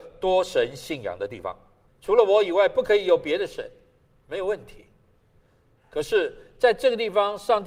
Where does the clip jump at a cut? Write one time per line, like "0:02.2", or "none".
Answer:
0:01.9